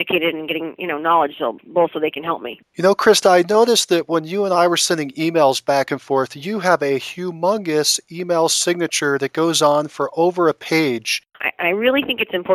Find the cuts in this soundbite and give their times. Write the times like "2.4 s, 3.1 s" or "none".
2.6 s, 11.3 s